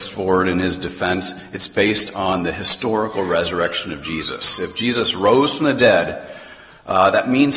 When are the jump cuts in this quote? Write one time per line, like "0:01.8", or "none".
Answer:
none